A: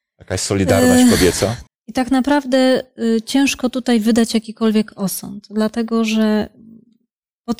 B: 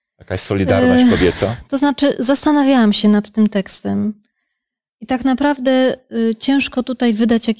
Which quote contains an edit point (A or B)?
A